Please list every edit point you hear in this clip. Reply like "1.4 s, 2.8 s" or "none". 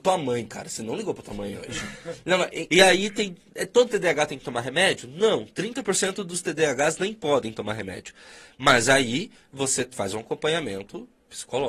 2.7 s